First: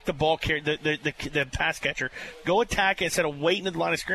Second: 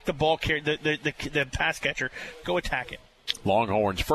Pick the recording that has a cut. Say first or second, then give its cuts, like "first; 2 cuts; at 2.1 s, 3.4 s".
second; 1 cut; at 2.4 s